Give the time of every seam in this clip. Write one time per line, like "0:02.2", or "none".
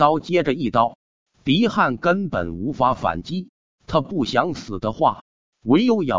0:03.8